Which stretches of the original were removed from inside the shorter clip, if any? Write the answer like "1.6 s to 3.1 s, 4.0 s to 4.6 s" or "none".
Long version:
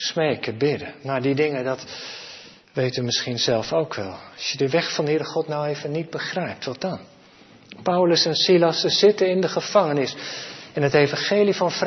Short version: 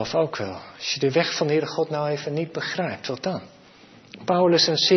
none